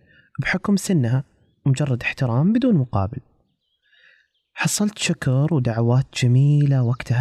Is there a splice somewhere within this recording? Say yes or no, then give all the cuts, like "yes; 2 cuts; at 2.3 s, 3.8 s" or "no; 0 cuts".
no; 0 cuts